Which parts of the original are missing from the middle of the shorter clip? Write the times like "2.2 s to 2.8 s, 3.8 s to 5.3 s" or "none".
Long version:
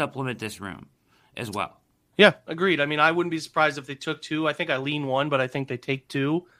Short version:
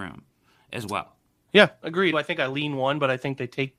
2.8 s to 4.4 s

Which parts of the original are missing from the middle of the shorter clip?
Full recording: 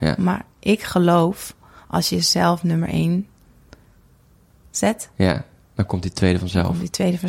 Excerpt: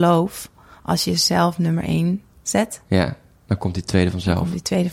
3.4 s to 4.6 s

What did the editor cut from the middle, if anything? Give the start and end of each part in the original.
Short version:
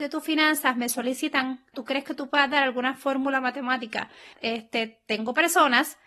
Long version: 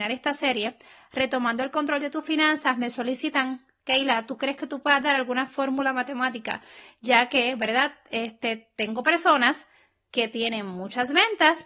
3.7 s to 4.3 s, 6.9 s to 8.0 s

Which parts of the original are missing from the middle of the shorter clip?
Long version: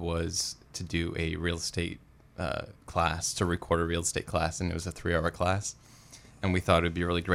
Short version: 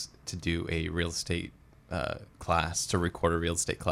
none

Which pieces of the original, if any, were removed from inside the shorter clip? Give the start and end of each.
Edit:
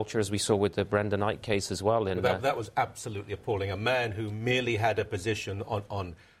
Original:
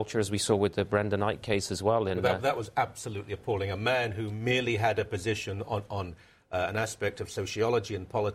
none

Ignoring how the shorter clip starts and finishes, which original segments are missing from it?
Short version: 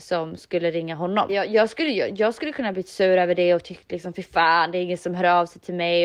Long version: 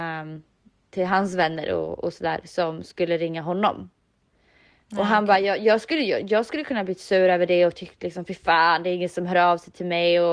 3.8 s to 5.4 s

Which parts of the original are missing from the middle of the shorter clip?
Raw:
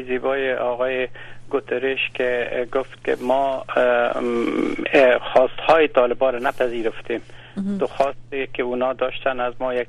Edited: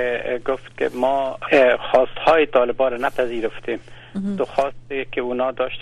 3.7 s to 4.9 s

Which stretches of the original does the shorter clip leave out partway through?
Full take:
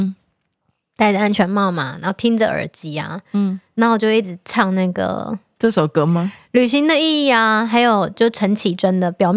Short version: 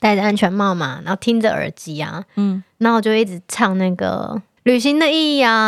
5.5 s to 6.5 s

